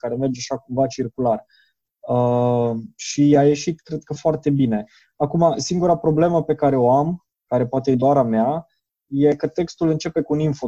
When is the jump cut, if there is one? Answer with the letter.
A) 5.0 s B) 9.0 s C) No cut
C